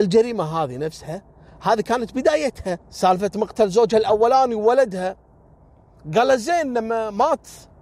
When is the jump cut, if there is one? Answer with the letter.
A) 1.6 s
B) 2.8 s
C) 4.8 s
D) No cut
B